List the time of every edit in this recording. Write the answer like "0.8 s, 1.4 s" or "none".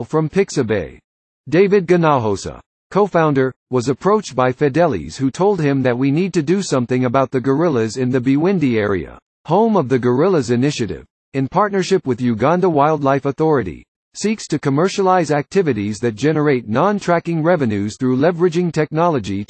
9.3 s